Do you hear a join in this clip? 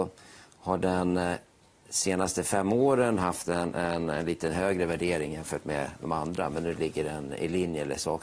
no; 0 cuts

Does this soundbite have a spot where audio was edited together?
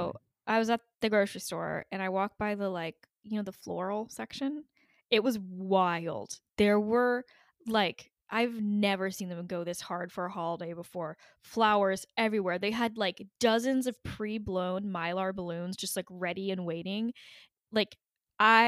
no; 0 cuts

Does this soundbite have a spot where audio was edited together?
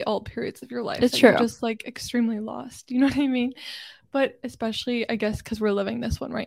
no; 0 cuts

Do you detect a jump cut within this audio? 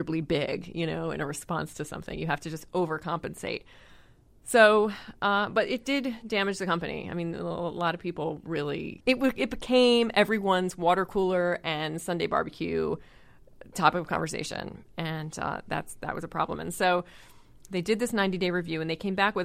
yes; 2 cuts; at 9.0 s, 16.6 s

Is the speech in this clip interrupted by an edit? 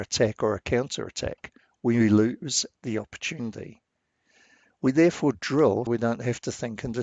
yes; 1 cut; at 5.9 s

